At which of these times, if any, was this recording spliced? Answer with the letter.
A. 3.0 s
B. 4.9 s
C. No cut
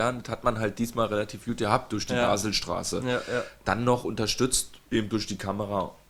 B